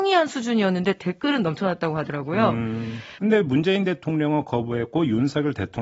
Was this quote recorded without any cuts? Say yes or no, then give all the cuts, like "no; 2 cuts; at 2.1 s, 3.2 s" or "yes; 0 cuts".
no; 1 cut; at 3.2 s